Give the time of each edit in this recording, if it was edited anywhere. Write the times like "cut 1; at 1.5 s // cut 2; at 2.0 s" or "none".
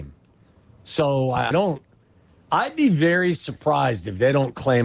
cut 1; at 1.5 s